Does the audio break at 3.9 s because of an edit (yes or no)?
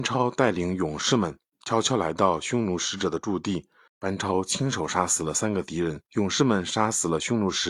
yes